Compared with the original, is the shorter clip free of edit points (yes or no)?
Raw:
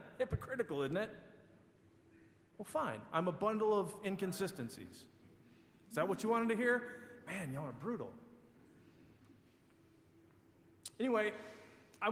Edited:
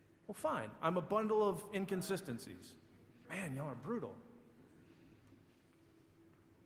no